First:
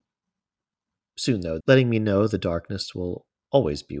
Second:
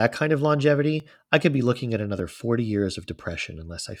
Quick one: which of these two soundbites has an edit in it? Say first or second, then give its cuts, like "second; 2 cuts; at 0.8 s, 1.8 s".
first; 1 cut; at 1.6 s